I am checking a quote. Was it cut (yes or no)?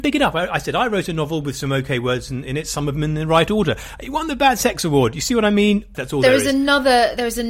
yes